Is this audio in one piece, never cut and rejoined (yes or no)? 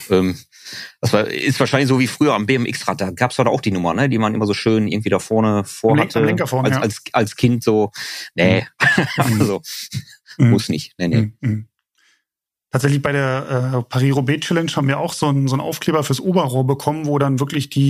yes